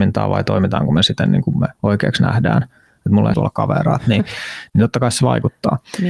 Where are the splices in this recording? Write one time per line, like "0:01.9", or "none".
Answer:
0:01.7
0:03.3